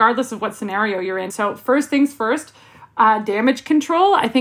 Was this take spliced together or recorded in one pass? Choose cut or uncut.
cut